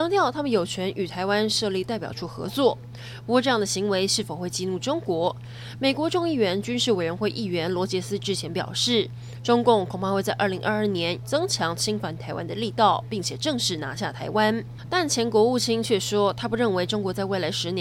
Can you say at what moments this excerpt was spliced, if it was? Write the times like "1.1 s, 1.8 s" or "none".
11.2 s